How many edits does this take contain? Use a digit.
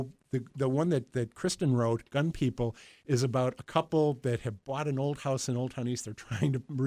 0